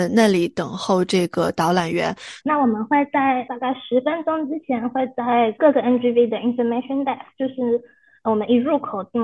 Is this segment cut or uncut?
cut